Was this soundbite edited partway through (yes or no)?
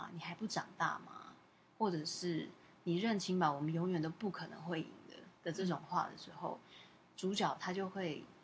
no